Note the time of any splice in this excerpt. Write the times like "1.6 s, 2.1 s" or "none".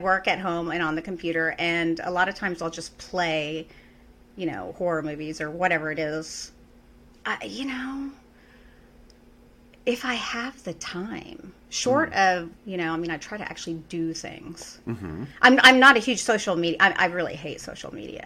12.6 s